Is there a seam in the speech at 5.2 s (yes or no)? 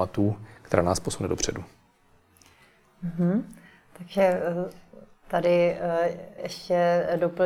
no